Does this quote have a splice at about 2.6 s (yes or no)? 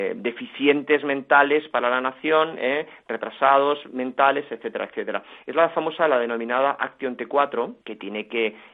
no